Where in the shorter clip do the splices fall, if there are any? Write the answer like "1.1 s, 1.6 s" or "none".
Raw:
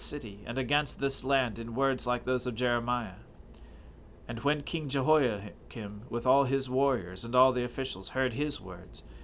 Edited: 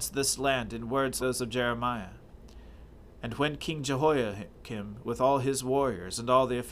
1.2 s